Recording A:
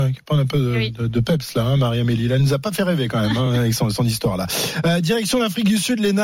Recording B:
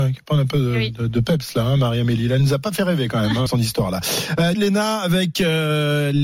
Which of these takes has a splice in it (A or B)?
B